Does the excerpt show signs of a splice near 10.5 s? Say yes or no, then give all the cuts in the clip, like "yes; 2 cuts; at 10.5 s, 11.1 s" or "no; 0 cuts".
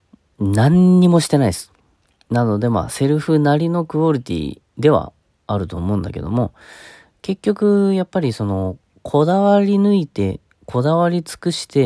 no; 1 cut; at 2.2 s